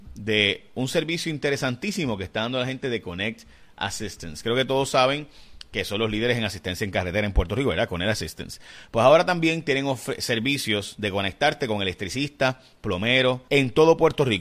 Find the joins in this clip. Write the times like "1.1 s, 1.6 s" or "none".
13.5 s